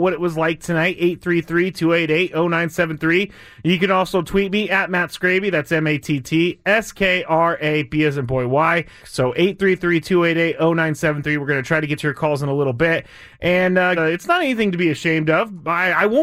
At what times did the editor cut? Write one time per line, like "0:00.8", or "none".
0:09.0
0:14.0